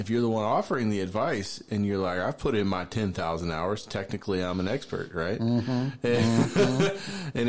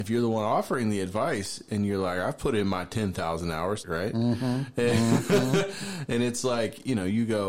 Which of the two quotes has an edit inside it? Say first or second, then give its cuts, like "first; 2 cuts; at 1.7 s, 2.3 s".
second; 1 cut; at 3.8 s